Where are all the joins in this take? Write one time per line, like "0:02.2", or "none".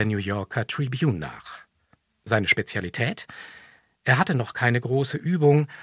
0:02.1